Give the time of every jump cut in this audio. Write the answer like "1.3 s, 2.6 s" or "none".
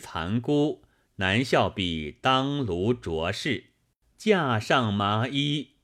4.1 s